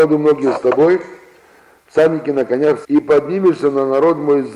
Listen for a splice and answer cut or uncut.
cut